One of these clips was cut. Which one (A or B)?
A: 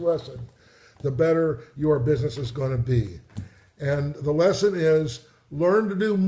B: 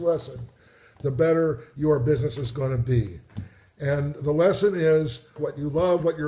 B